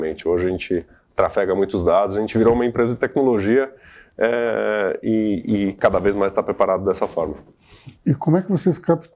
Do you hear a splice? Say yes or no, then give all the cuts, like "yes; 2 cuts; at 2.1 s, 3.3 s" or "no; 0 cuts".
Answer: no; 0 cuts